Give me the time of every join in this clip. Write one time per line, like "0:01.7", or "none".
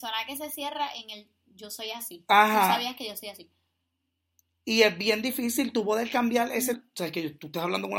0:06.7